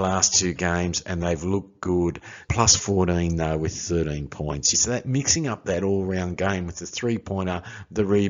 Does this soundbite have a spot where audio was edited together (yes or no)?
yes